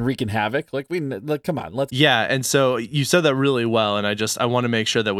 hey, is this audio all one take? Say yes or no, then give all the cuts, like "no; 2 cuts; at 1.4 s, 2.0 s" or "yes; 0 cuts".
no; 1 cut; at 1.9 s